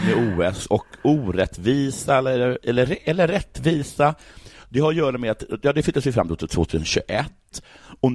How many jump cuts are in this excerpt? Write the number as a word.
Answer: zero